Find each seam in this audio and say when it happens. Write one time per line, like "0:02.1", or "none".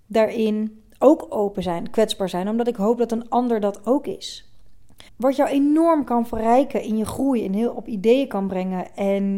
0:05.1